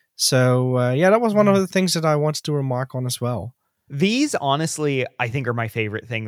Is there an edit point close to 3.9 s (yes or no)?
yes